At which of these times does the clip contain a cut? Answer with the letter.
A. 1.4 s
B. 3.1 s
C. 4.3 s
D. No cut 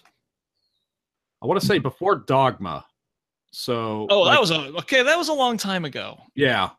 D